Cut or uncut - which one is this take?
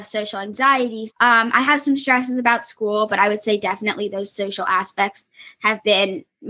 cut